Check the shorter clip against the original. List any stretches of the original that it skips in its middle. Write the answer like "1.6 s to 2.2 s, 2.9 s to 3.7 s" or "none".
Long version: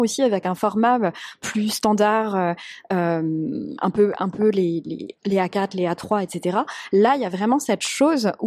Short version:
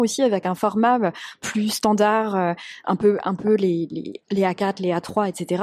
2.8 s to 3.8 s